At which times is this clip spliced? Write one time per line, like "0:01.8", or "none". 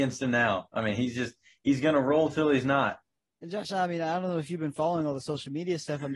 none

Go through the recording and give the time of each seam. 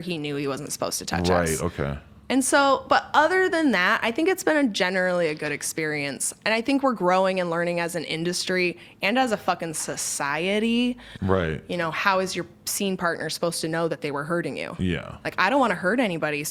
0:11.2

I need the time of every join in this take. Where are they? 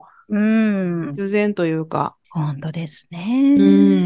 0:02.2

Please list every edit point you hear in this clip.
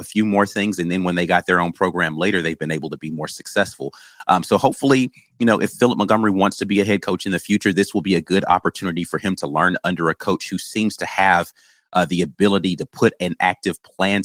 none

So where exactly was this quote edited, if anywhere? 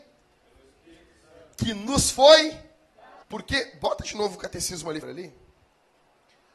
0:03.2
0:05.0

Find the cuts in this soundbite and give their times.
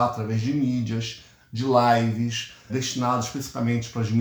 0:02.7

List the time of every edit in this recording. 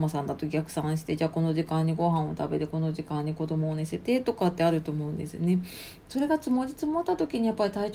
0:06.0

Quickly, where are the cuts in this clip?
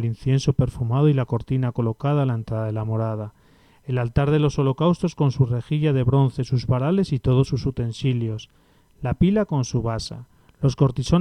none

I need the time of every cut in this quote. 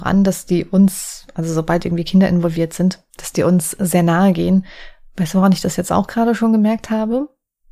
0:03.1

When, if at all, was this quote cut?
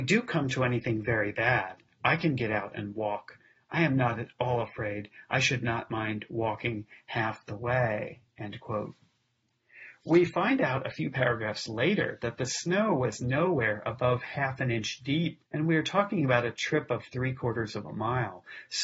0:15.5

